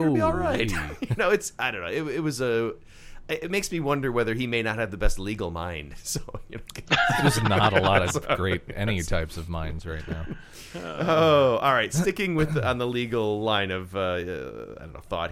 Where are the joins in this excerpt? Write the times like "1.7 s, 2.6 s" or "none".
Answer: none